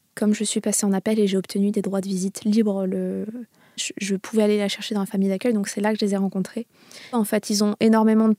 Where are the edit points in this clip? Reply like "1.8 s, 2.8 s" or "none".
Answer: 3.8 s, 7.1 s